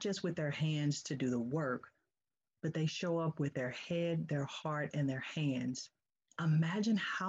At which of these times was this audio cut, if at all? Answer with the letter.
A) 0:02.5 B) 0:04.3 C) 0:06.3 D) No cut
C